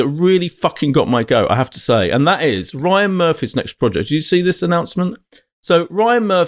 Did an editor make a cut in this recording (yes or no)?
no